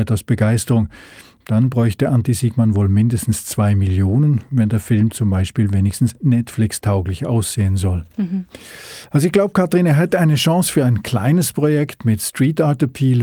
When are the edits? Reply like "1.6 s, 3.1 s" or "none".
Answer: none